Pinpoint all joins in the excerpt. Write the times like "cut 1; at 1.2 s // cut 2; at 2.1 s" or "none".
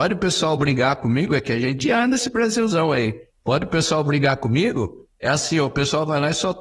none

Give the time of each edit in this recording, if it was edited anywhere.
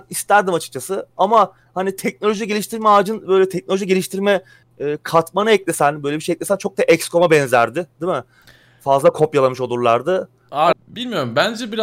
cut 1; at 10.7 s

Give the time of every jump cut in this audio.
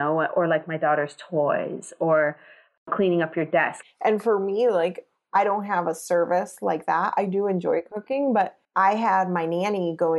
cut 1; at 3.8 s // cut 2; at 8.6 s

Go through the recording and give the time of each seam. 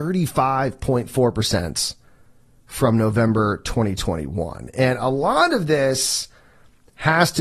none

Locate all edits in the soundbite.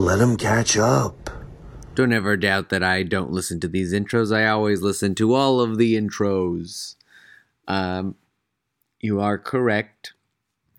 none

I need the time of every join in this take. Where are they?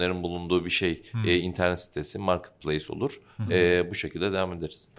none

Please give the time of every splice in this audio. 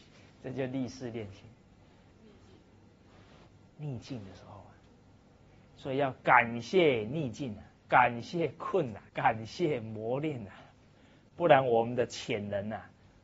cut 1; at 2.1 s // cut 2; at 7.8 s // cut 3; at 9.1 s

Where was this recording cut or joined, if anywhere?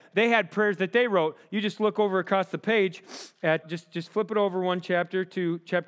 cut 1; at 3.6 s

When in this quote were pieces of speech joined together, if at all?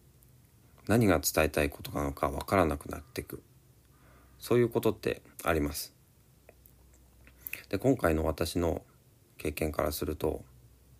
cut 1; at 5.3 s

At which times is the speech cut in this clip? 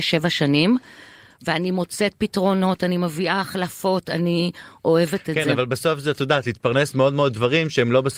none

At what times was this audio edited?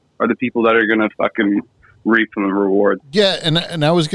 cut 1; at 3.0 s

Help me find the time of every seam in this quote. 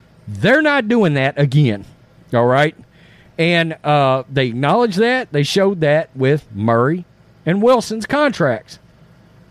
none

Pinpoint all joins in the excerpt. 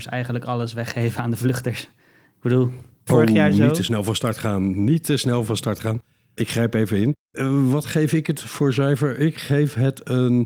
cut 1; at 3.1 s // cut 2; at 7.2 s

